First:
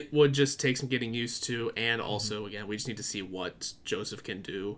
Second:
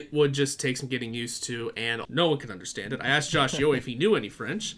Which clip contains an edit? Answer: second; 1 cut; at 2.0 s

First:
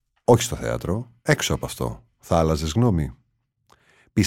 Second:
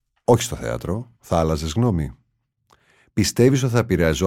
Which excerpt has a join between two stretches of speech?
second; 1 cut; at 1.2 s

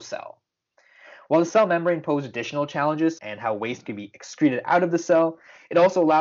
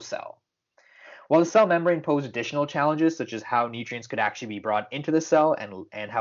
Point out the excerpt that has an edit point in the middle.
first; 1 cut; at 3.2 s

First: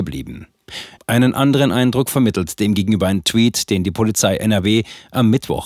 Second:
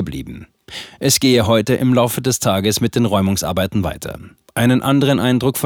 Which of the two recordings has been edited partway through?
first; 1 cut; at 1.0 s

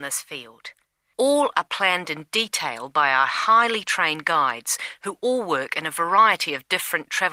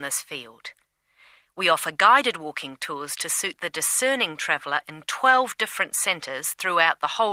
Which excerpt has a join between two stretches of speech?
first; 1 cut; at 1.1 s

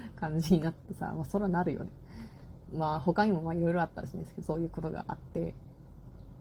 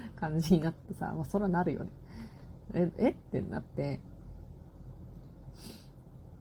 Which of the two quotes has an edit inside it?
first; 2 cuts; at 2.7 s, 4.4 s

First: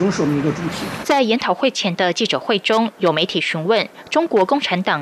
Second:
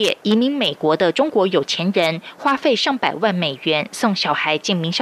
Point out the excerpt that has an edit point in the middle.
first; 1 cut; at 1.0 s

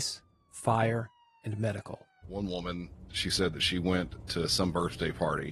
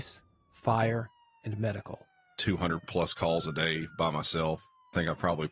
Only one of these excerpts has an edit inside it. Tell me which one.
first; 1 cut; at 2.2 s

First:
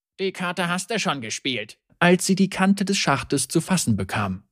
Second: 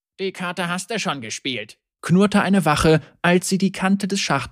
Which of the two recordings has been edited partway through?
first; 1 cut; at 1.9 s

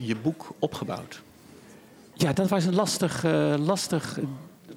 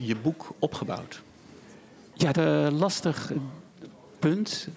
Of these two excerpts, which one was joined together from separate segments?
second; 1 cut; at 2.3 s

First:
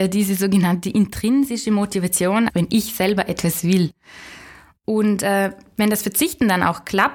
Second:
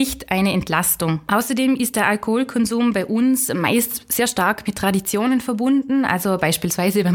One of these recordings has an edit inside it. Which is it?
first; 1 cut; at 2.5 s

